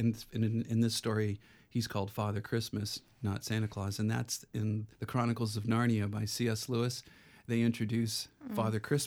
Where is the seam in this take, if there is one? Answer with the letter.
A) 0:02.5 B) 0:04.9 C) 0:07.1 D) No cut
B